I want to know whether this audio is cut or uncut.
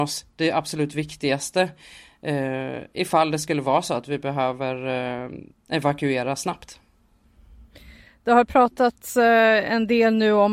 uncut